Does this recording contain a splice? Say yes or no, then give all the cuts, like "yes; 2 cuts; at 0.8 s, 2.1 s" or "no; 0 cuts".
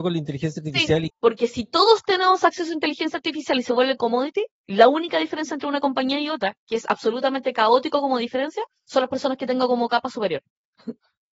yes; 1 cut; at 1.1 s